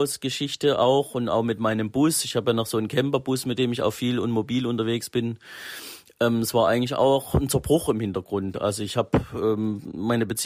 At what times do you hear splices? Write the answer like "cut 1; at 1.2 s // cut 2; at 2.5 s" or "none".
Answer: none